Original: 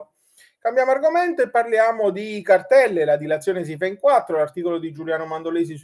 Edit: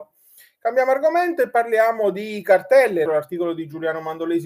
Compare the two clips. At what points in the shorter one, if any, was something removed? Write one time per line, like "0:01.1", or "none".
0:03.1